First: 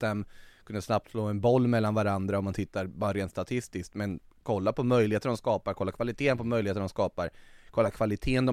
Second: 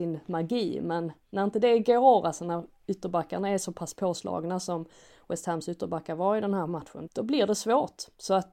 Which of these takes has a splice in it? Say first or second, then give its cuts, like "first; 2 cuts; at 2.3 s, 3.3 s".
second; 1 cut; at 7.1 s